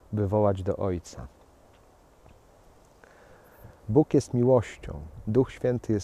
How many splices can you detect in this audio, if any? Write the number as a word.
one